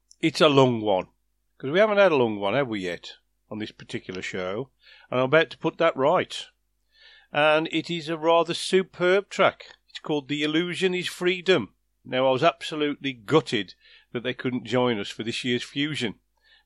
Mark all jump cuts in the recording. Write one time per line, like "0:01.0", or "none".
0:01.5
0:12.0